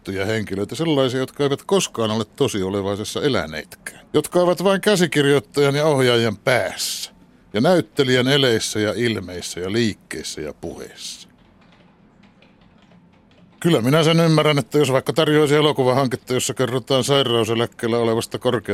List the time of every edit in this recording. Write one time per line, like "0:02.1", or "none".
0:04.1